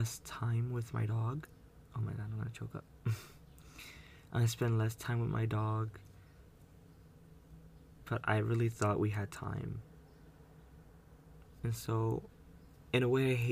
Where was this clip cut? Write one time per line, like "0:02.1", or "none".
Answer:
0:11.4